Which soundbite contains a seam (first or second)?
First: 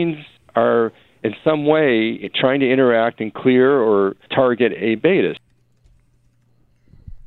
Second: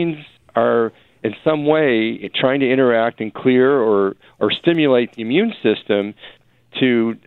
first